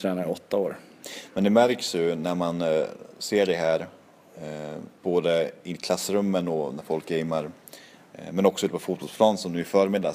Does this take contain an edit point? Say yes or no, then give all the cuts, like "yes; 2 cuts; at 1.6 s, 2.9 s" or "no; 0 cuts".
yes; 1 cut; at 5.0 s